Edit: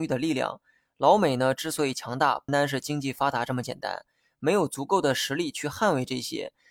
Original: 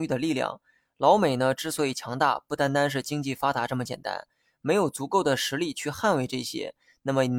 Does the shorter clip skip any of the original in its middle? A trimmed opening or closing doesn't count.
yes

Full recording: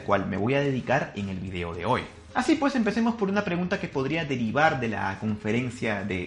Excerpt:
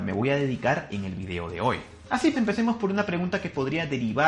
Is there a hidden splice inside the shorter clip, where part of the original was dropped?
yes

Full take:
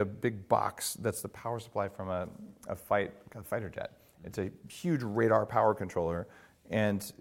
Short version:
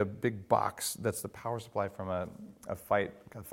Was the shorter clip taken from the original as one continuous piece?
yes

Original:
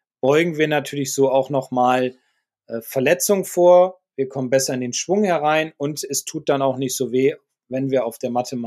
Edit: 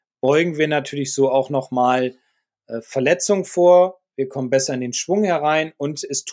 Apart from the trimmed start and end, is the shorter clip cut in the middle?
no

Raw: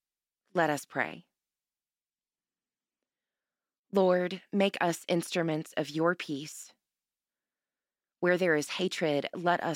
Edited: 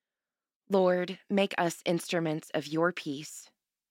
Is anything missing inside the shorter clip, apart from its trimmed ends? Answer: no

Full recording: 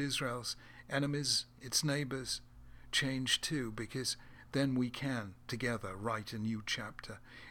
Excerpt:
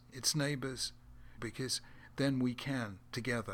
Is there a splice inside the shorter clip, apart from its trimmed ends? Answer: yes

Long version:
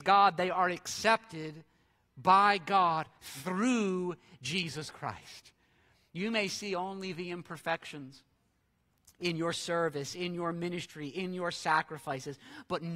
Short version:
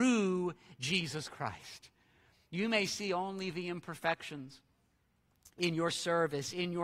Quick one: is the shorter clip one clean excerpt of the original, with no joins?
yes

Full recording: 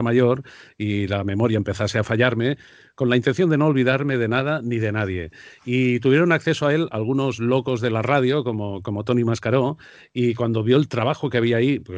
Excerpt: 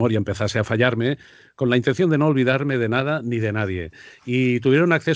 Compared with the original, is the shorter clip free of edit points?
yes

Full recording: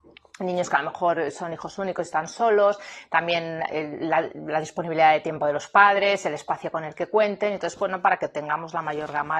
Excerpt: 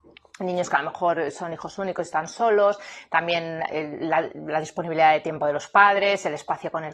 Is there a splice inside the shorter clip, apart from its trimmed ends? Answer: no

